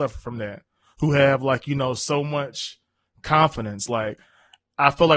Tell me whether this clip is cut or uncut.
uncut